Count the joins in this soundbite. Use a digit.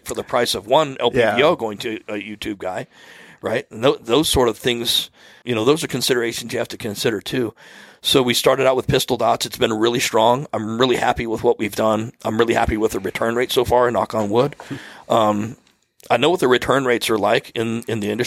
1